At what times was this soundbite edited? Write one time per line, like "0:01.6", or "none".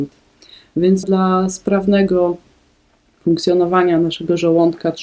0:01.0